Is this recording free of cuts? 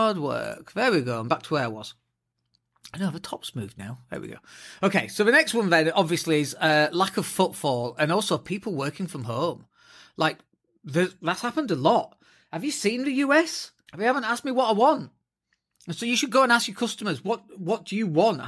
no; 1 cut; at 13.9 s

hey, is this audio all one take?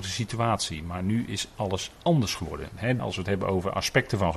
no; 1 cut; at 3.0 s

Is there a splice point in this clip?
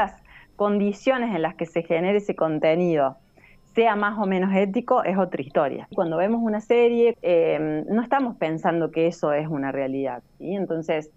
yes; 2 cuts; at 5.9 s, 7.1 s

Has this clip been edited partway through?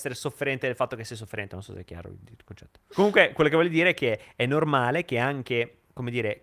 yes; 1 cut; at 2.9 s

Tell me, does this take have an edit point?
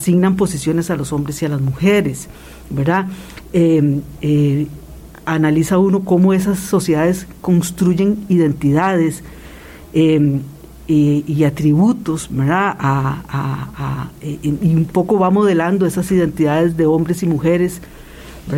no; 0 cuts

